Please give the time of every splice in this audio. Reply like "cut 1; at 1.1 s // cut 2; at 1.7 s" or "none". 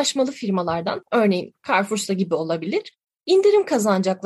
cut 1; at 1.0 s